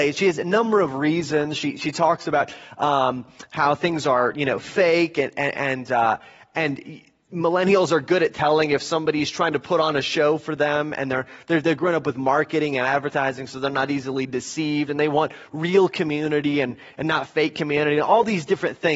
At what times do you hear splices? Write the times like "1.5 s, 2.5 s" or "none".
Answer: none